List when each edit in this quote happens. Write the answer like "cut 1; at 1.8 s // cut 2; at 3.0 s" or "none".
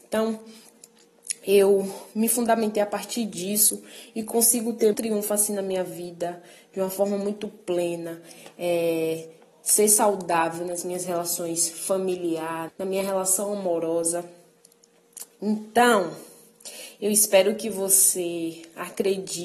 cut 1; at 4.9 s // cut 2; at 12.7 s